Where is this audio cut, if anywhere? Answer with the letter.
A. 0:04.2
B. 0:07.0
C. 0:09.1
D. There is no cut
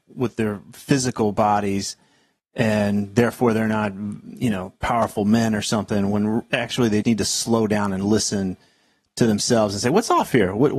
B